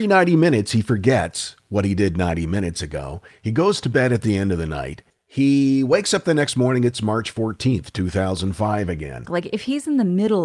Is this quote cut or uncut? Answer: cut